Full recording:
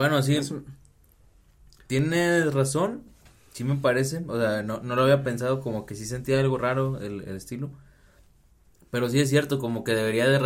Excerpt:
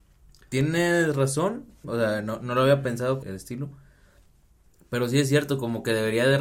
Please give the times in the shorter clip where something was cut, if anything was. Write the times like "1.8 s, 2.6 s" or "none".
1.8 s, 3.2 s